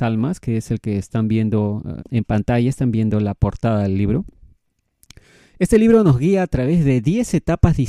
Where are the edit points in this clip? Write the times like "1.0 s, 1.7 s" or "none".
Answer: 2.0 s

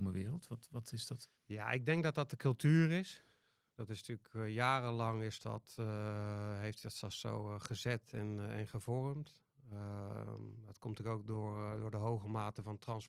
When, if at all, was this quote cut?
1.3 s

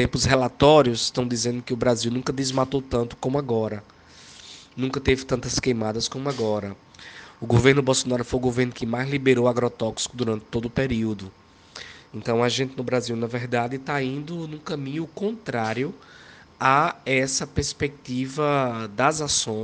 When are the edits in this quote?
none

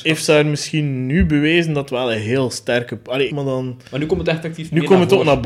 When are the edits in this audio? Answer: 3.3 s

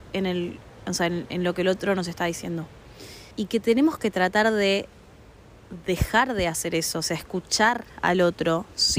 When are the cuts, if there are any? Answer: 3.3 s

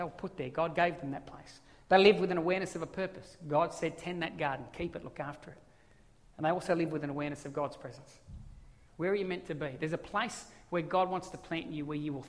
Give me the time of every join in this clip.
8.9 s

